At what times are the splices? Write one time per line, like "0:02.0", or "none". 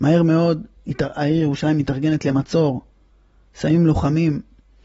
none